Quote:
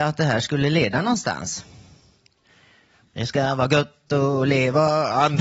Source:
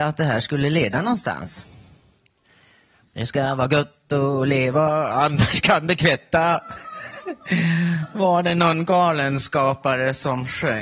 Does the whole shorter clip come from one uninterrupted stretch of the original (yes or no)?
yes